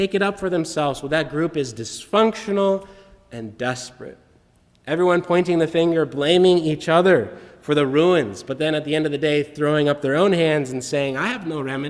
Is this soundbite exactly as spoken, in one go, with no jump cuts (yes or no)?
yes